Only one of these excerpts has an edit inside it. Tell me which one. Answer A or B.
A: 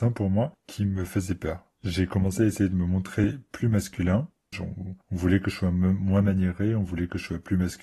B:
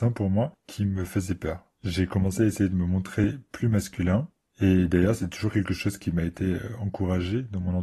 A